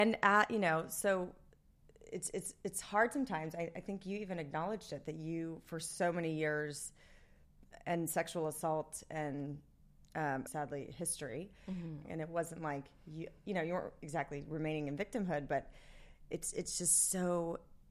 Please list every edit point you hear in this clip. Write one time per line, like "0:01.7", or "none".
0:10.5
0:12.0